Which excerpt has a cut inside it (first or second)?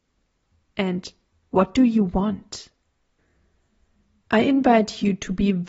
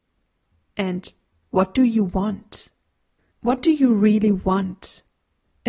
second